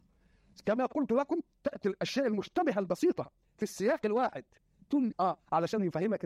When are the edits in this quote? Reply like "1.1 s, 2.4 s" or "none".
5.1 s